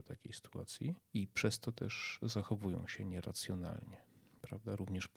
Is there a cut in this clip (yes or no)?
yes